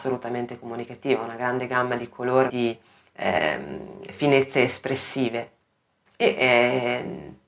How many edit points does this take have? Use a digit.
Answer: 2